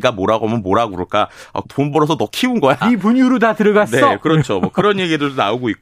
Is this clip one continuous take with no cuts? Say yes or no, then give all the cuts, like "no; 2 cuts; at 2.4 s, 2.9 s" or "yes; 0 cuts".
no; 2 cuts; at 1.6 s, 2.8 s